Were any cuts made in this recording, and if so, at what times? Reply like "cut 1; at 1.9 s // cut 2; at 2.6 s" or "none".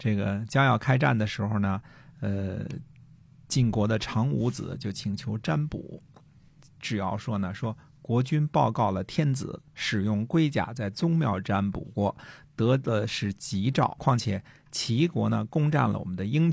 cut 1; at 14.0 s